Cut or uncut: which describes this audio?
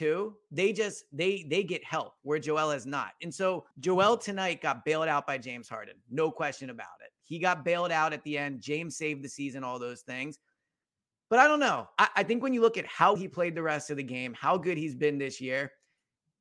cut